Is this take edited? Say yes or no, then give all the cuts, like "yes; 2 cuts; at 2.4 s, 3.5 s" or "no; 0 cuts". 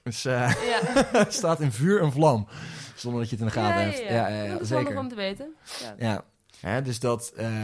no; 0 cuts